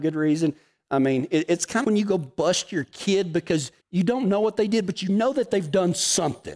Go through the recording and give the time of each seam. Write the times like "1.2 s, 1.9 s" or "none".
1.8 s, 3.8 s